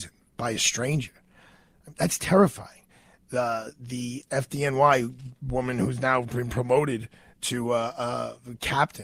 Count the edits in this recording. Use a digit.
1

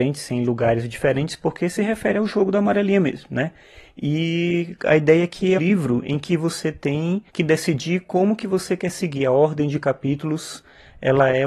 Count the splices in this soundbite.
2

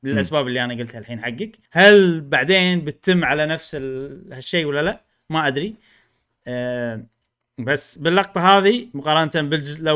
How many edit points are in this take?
1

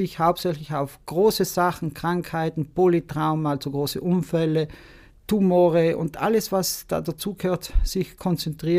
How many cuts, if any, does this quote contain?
0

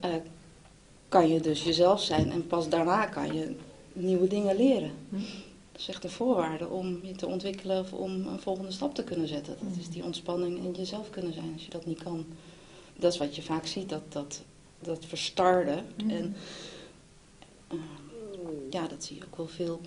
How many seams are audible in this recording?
2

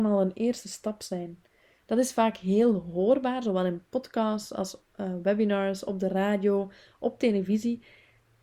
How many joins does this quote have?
1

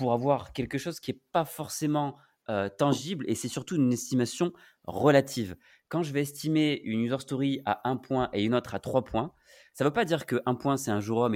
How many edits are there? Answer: 0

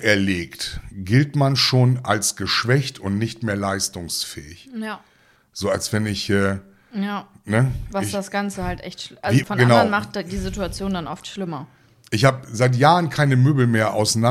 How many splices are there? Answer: 2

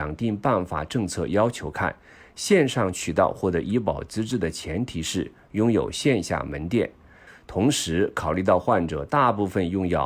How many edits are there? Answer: 1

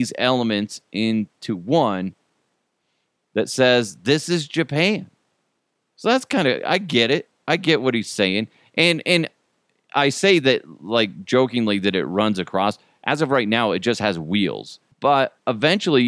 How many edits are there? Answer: 1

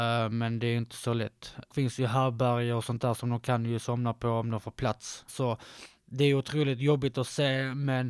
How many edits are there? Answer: 1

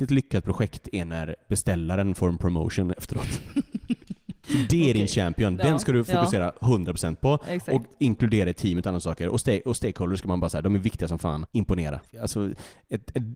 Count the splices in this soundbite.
1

